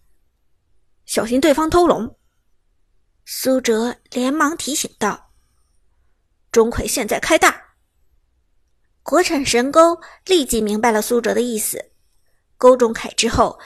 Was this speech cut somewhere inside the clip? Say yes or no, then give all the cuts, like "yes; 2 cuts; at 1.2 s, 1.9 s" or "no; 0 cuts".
no; 0 cuts